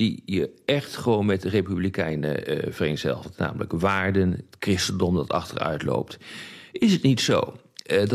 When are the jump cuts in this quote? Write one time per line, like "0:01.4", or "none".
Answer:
none